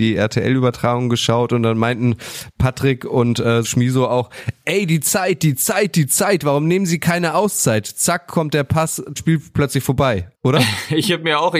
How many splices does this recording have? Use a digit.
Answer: 3